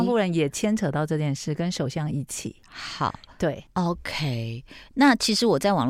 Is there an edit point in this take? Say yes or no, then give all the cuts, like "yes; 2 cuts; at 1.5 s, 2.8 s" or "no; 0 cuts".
no; 0 cuts